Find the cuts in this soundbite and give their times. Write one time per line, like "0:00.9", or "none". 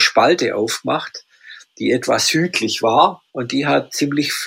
0:03.3